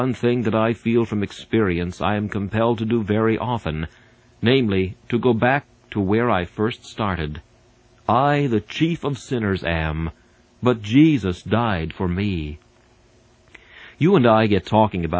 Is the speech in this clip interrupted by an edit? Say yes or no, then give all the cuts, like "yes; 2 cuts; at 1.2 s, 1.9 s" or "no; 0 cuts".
no; 0 cuts